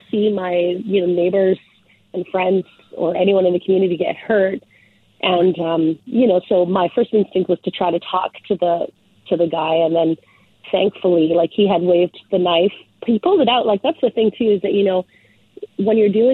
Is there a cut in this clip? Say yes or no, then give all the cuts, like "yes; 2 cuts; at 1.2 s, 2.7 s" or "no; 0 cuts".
no; 0 cuts